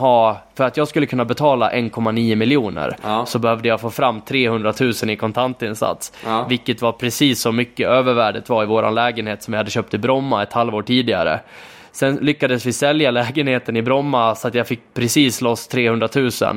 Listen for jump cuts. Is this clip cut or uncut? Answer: uncut